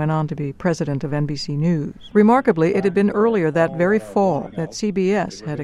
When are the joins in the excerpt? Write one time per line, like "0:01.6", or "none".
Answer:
0:02.1
0:04.5